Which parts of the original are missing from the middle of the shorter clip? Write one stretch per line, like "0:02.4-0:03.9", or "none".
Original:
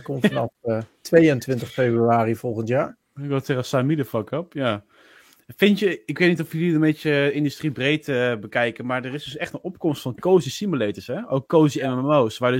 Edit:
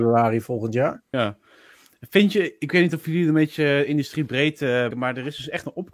0:03.1-0:04.6
0:08.4-0:08.8